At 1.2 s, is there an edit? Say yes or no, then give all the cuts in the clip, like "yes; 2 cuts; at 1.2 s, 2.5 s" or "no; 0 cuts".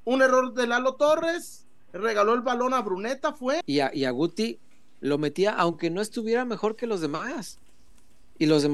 no; 1 cut; at 3.6 s